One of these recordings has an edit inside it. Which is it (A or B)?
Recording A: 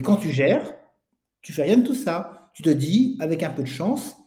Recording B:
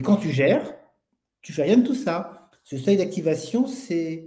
B